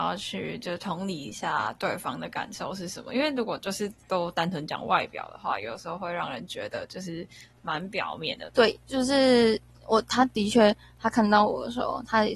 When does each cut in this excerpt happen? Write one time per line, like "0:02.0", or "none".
0:08.5